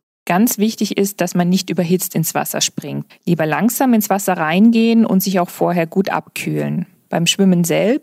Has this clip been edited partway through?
yes; 1 cut; at 3.1 s

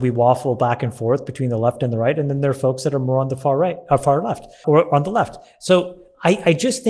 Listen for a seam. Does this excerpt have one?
yes; 1 cut; at 4.6 s

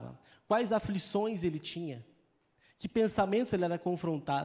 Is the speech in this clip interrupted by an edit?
no; 0 cuts

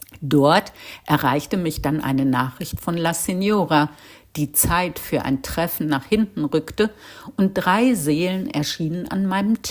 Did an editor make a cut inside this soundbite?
no; 0 cuts

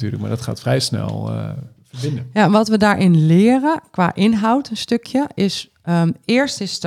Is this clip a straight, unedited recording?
yes; 0 cuts

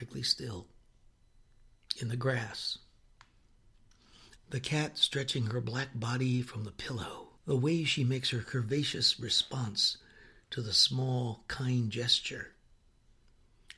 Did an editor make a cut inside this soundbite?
yes; 2 cuts; at 4.4 s, 7.4 s

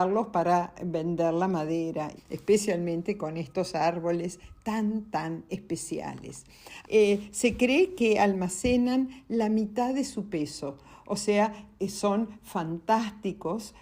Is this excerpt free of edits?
no; 2 cuts; at 2.2 s, 6.8 s

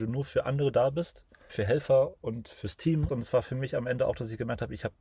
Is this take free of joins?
no; 2 cuts; at 1.5 s, 3.1 s

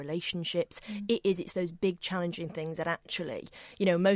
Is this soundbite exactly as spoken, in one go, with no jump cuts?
yes; 0 cuts

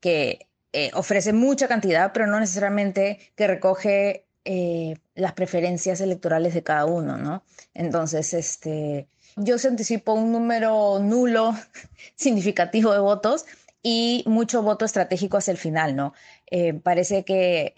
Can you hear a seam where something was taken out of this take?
yes; 2 cuts; at 4.3 s, 9.4 s

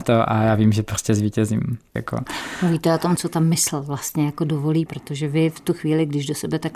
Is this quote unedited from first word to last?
no; 2 cuts; at 2.0 s, 4.9 s

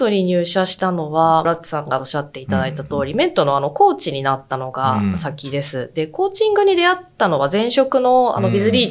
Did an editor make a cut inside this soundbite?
yes; 1 cut; at 1.5 s

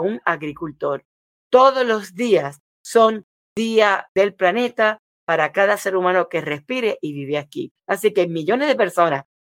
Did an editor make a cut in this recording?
yes; 1 cut; at 1.4 s

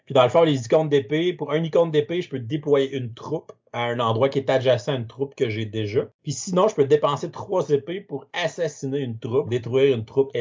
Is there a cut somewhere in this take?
yes; 2 cuts; at 6.1 s, 9.5 s

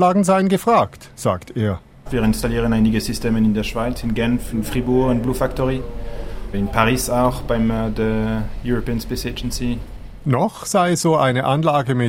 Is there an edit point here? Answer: no; 0 cuts

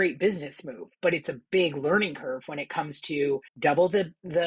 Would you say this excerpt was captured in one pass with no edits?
no; 1 cut; at 3.5 s

